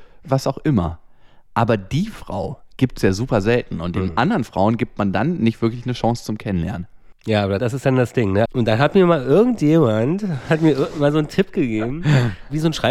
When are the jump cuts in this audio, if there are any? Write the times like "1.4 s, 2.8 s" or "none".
7.1 s, 8.5 s